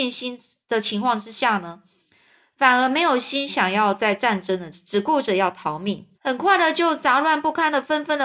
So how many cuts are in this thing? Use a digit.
2